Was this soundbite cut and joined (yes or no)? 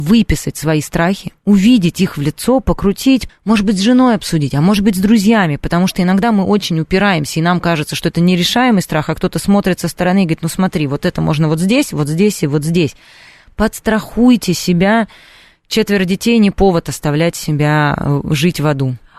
yes